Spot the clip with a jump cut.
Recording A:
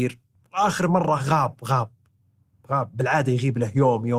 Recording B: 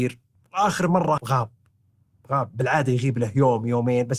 B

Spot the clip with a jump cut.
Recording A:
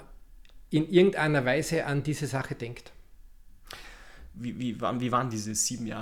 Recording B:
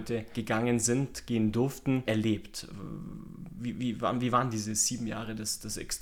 A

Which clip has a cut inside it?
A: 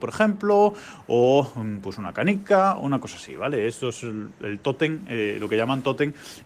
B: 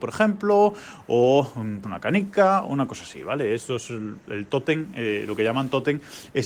B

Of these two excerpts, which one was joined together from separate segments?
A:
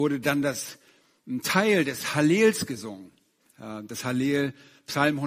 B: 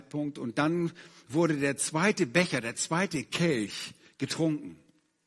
A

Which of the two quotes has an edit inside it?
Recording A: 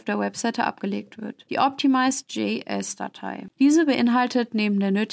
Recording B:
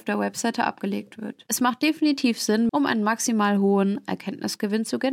B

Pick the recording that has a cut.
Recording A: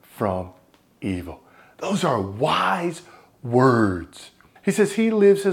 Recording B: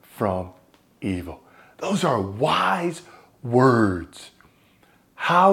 A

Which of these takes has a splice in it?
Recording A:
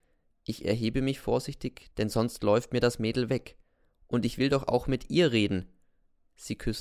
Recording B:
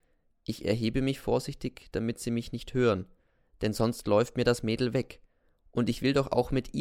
A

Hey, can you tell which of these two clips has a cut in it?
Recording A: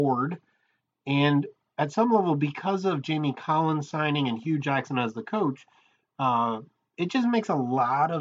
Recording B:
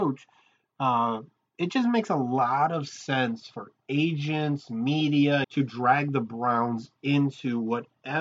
B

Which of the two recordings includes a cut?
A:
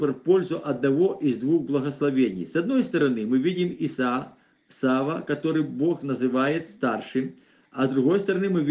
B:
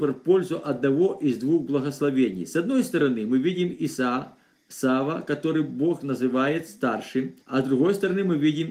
B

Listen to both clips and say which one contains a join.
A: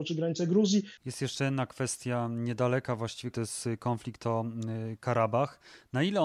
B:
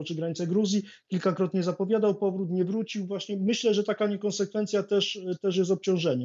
A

